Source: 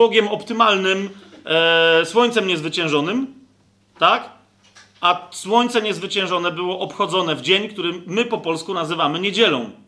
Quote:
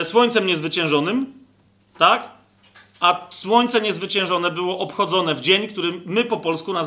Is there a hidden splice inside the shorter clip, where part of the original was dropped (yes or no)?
no